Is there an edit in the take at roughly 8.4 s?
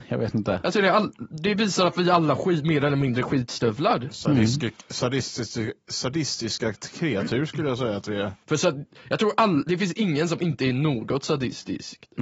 yes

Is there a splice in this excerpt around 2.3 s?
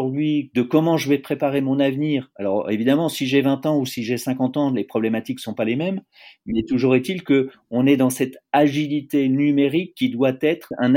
no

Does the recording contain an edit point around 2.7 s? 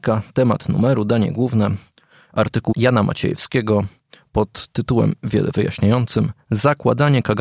yes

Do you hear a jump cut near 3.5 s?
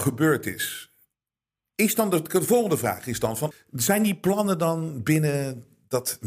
yes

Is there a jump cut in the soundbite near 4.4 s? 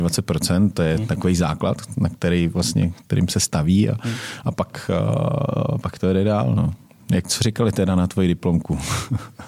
no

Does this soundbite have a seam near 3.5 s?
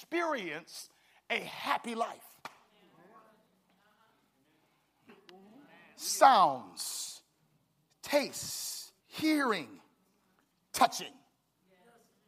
no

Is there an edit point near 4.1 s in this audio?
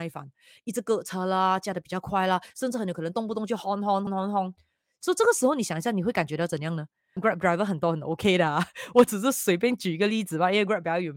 yes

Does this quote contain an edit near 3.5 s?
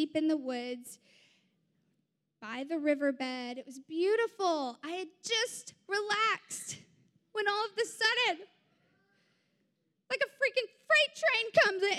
no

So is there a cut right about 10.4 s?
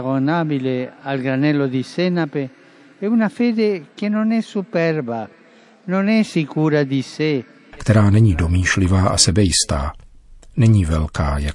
no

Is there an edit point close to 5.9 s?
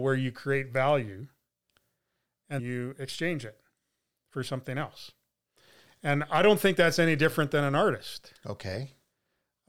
no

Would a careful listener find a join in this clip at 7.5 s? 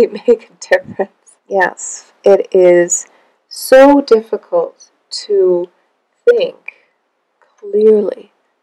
no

